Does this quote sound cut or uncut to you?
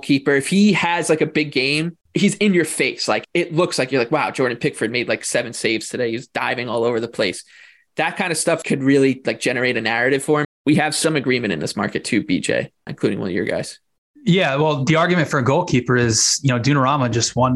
cut